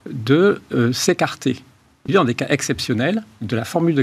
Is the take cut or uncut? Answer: cut